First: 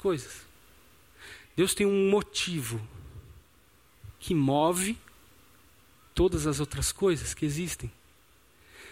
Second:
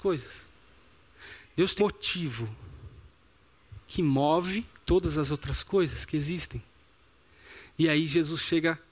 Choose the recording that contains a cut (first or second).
second